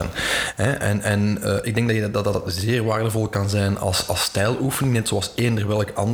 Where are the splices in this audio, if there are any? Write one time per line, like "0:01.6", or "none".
none